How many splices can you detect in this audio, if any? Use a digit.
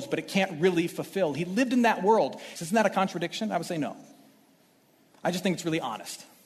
1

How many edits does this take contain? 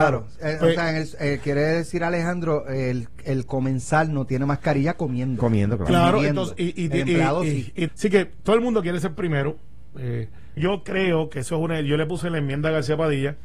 2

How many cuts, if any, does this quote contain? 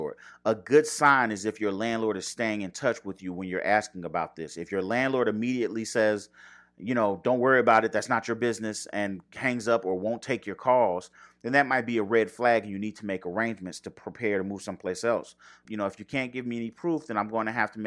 1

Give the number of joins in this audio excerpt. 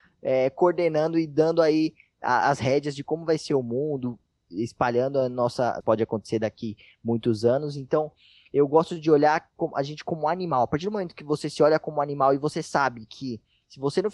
1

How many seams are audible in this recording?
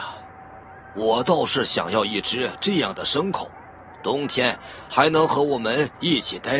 1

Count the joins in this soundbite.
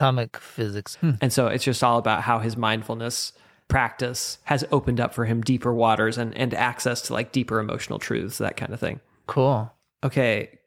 1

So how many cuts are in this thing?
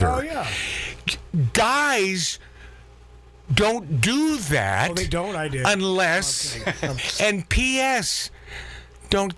1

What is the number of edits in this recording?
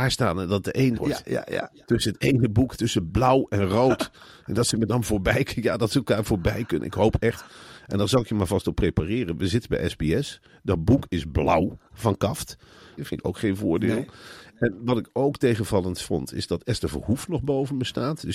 2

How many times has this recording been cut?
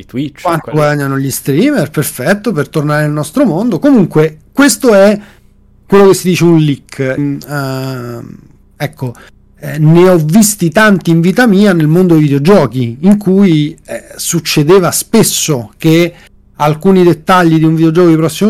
1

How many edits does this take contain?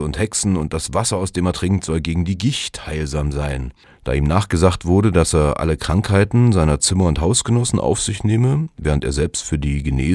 0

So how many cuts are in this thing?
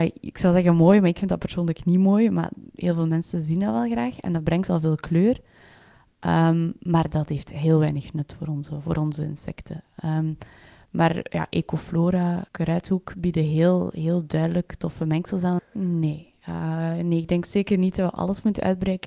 2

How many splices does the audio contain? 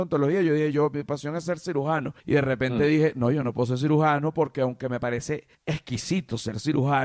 2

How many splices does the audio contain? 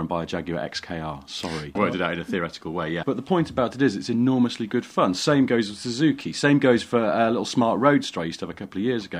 2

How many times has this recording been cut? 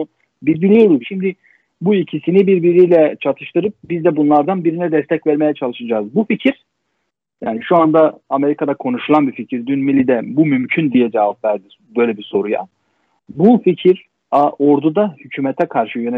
1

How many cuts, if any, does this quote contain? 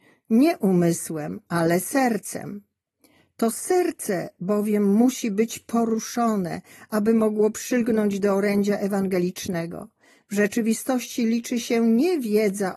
0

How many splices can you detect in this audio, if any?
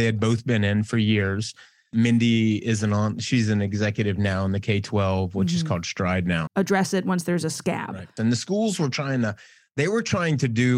2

